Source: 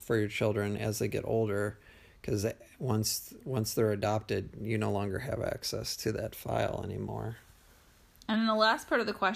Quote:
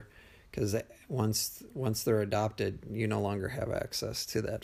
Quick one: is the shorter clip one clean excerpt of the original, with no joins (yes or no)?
yes